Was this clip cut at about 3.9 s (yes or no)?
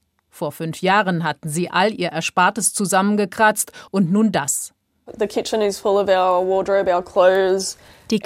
yes